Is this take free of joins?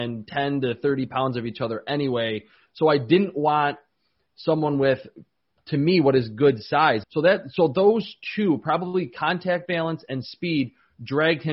no; 1 cut; at 7.0 s

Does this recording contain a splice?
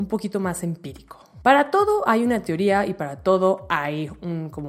no; 0 cuts

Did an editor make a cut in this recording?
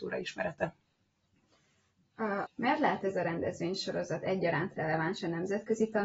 yes; 1 cut; at 2.5 s

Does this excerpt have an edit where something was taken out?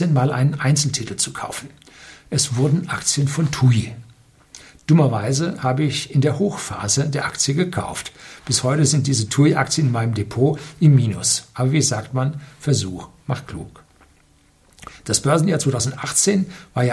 no; 0 cuts

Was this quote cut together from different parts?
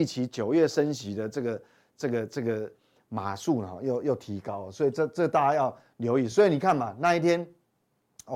no; 0 cuts

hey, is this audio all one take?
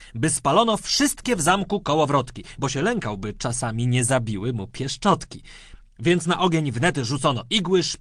yes; 0 cuts

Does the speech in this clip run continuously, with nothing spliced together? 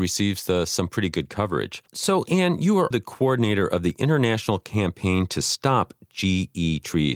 no; 2 cuts; at 1.9 s, 2.9 s

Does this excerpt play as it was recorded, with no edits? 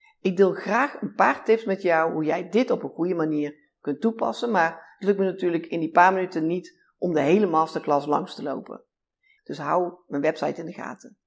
no; 1 cut; at 9.4 s

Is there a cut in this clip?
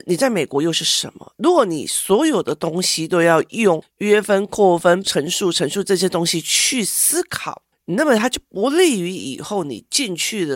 yes; 1 cut; at 5.0 s

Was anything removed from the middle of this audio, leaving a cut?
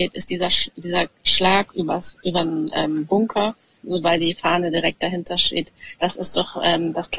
yes; 1 cut; at 4.0 s

